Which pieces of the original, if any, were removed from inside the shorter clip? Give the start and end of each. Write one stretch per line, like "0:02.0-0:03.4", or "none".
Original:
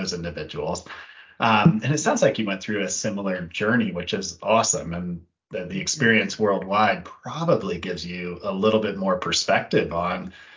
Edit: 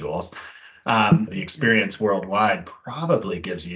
0:01.8-0:05.7